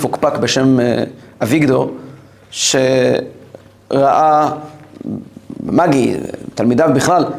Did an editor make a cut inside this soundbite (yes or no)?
no